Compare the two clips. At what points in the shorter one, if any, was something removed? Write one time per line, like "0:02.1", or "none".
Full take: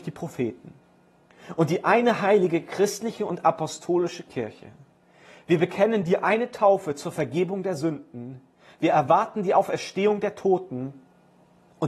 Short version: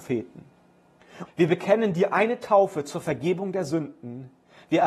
0:01.3